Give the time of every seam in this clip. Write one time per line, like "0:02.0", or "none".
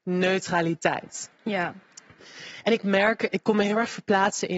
none